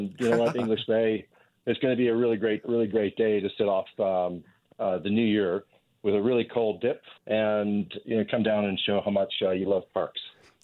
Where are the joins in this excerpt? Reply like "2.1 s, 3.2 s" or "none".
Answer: 2.6 s, 7.2 s